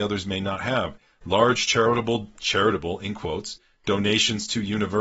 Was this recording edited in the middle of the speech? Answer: no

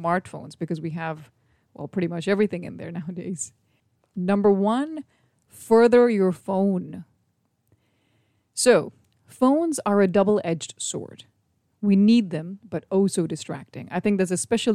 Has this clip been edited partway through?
yes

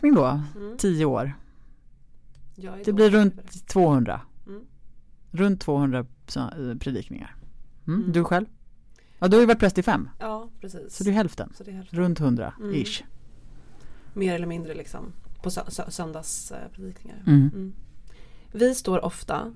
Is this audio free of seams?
yes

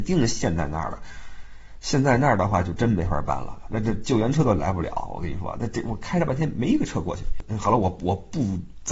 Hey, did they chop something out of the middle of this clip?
no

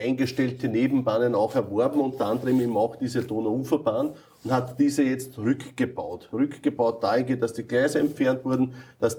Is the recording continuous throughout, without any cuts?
yes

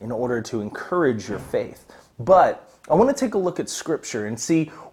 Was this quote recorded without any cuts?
yes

